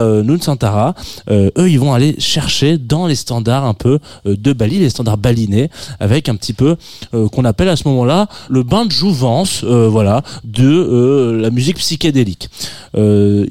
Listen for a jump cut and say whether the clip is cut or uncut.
cut